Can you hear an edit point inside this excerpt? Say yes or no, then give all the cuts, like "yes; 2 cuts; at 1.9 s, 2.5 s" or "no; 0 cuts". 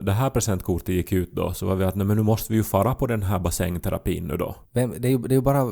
yes; 1 cut; at 4.6 s